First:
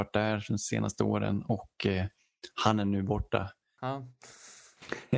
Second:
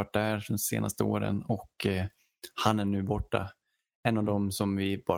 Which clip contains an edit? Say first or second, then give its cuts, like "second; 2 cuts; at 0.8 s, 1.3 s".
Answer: first; 1 cut; at 3.8 s